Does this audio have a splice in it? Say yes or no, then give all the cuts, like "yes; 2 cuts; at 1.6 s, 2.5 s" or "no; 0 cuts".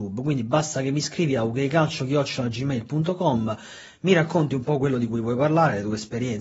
no; 0 cuts